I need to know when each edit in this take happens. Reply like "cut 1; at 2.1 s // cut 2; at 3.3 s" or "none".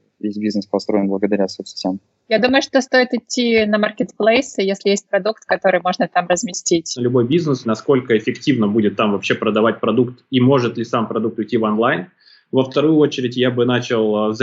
cut 1; at 7.6 s